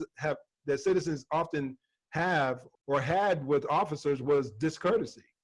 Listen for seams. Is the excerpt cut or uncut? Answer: cut